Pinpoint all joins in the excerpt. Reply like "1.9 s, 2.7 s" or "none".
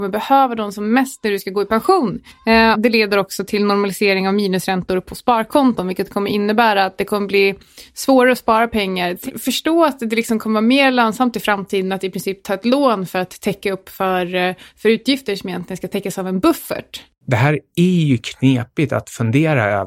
2.7 s